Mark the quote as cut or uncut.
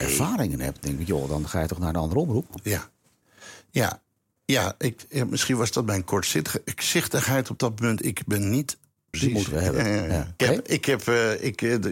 cut